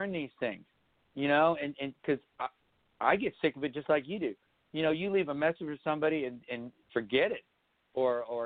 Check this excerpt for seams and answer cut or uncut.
uncut